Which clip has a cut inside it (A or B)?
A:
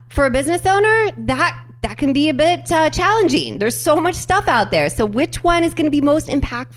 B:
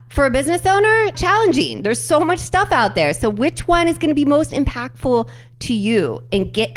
B